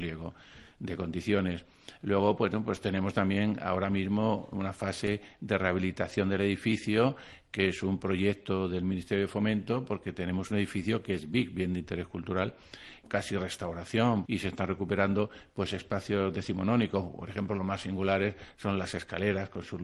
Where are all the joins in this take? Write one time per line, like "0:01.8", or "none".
0:13.0
0:14.3

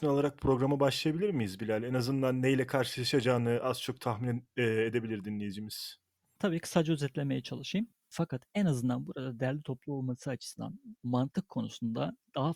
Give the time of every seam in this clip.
0:08.1
0:11.0

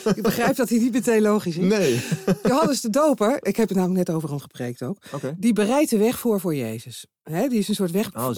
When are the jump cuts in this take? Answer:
none

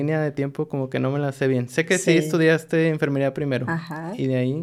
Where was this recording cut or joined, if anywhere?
none

